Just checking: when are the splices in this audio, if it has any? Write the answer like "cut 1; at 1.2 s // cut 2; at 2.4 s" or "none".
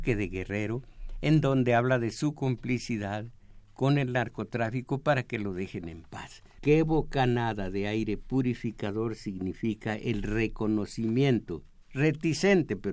cut 1; at 6.6 s